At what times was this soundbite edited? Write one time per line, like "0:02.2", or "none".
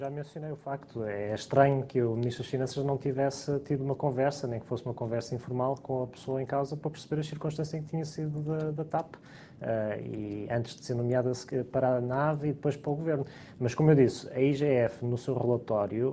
none